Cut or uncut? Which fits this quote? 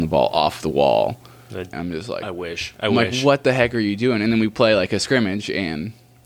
cut